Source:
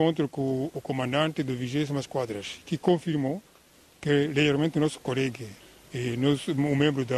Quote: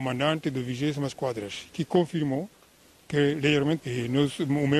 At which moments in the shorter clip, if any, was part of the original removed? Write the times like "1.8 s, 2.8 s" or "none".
3.8 s